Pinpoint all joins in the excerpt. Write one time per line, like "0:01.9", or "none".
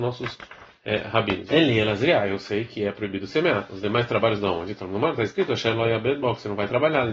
0:01.5